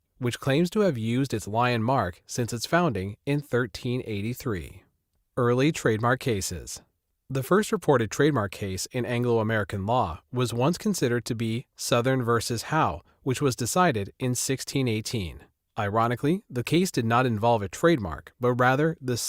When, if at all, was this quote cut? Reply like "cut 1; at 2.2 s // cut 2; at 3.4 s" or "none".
none